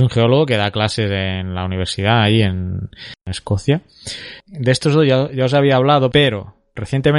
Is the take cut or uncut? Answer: cut